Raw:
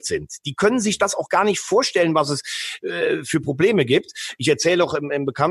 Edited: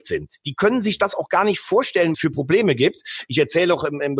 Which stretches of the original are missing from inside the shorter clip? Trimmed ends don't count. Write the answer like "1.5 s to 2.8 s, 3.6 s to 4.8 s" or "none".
2.1 s to 3.2 s